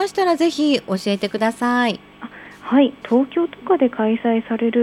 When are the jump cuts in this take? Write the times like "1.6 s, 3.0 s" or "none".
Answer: 3.0 s